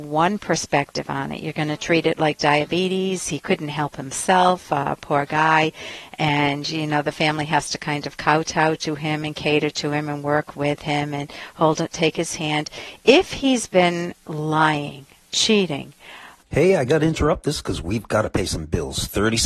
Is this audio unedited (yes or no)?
yes